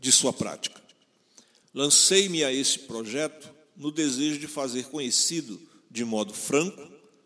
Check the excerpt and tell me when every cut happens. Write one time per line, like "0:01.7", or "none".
0:01.6